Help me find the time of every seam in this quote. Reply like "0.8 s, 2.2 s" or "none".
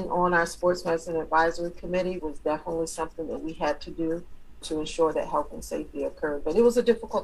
2.2 s, 4.6 s